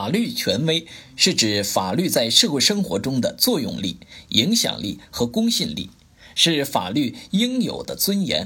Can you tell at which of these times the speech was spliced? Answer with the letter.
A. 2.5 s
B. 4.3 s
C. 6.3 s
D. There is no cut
D